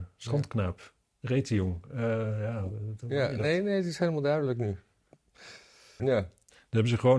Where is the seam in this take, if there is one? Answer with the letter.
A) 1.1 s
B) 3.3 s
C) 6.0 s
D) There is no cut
C